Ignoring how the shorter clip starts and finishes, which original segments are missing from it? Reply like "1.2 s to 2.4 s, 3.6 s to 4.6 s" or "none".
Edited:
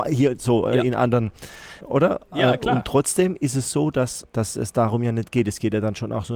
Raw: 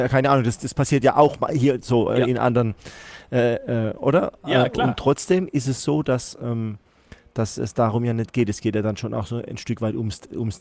3.2 s to 3.9 s, 6.4 s to 7.2 s